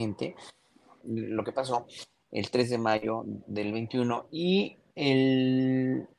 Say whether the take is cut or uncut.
cut